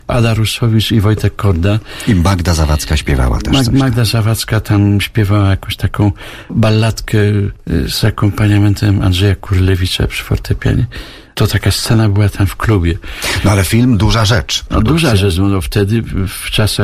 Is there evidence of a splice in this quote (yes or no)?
no